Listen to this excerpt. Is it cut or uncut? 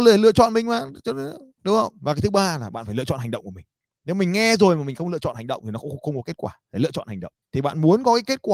cut